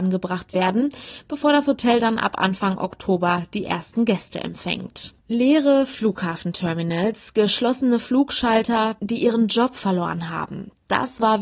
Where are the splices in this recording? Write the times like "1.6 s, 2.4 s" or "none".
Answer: 5.2 s, 9.0 s